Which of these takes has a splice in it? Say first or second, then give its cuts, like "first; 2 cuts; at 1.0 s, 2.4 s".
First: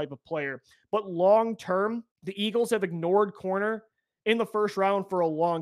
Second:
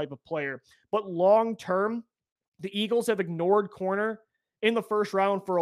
first; 1 cut; at 2.1 s